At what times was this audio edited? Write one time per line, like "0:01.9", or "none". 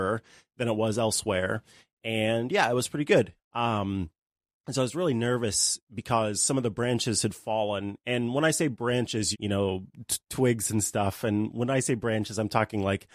0:03.4
0:09.3